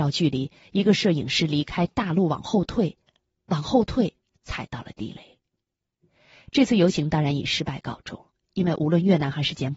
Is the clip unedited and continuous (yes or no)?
yes